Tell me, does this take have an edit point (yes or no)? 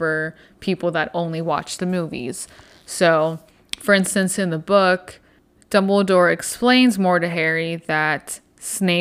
no